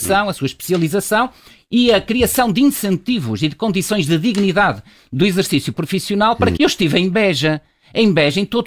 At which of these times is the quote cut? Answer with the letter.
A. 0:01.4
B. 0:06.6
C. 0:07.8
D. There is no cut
B